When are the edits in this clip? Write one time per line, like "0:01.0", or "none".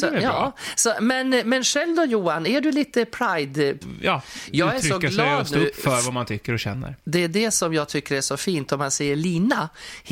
0:03.8

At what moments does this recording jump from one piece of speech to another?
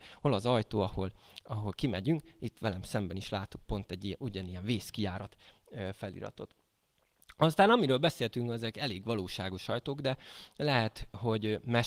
none

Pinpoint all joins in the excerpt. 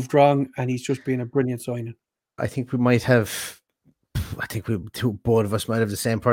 0:02.4

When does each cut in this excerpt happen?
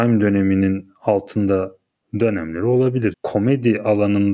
0:03.1

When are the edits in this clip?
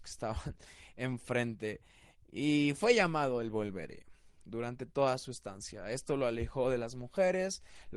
none

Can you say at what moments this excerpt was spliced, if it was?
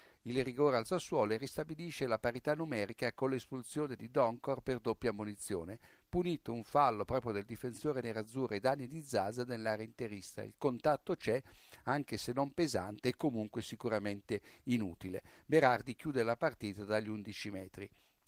none

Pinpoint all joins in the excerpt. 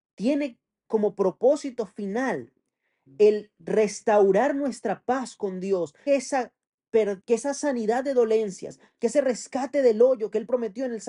0:06.1
0:07.2

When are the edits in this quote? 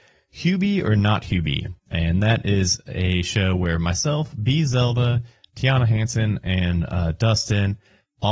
none

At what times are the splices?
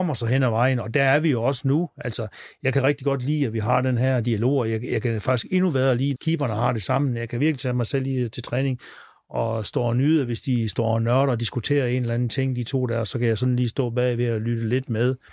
0:06.1

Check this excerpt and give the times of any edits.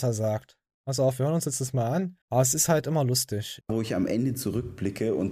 0:02.2
0:03.6

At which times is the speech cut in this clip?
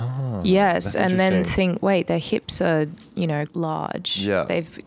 0:03.5

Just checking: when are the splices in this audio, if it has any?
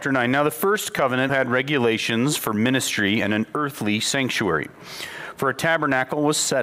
0:01.3

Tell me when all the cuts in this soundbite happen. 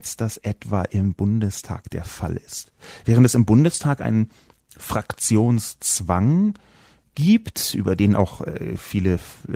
none

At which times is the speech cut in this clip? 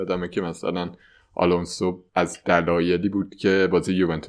0:02.1

